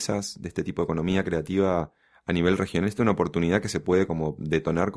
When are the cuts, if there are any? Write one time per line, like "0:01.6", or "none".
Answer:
none